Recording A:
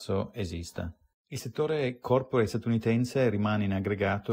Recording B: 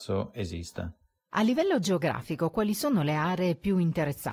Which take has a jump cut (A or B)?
A